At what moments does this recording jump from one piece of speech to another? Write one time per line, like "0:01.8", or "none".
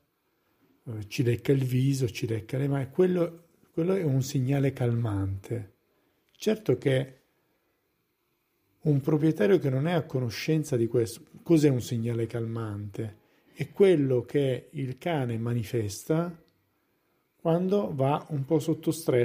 none